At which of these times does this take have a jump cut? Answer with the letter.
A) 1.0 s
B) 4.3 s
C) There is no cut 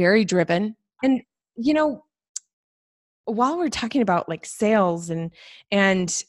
A